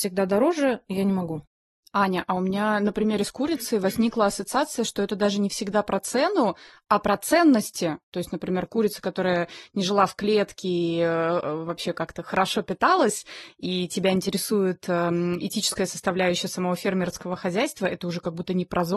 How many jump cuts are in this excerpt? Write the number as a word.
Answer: zero